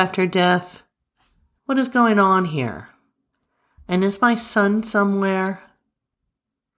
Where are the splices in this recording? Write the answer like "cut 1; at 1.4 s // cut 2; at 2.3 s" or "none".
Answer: cut 1; at 1.6 s